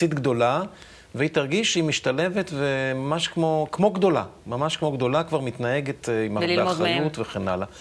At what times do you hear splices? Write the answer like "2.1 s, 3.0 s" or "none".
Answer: none